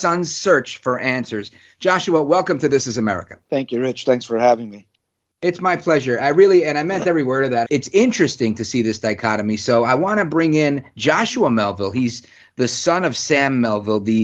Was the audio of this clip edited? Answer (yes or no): yes